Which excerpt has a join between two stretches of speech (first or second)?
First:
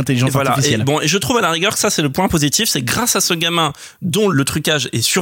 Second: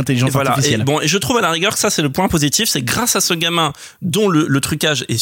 first